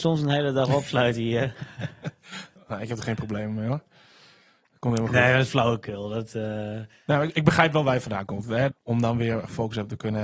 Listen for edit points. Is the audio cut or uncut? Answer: cut